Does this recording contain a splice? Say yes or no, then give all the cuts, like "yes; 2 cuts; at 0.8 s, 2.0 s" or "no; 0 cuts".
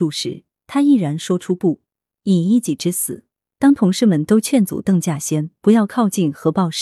yes; 1 cut; at 3.5 s